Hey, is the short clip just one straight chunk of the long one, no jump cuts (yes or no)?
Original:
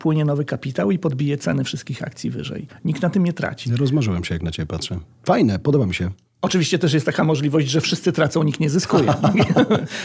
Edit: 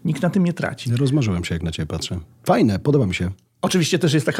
yes